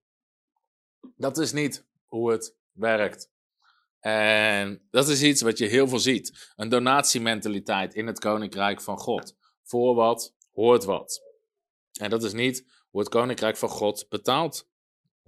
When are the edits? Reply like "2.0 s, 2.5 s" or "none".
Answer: none